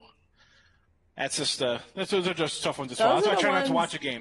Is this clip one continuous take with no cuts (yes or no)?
yes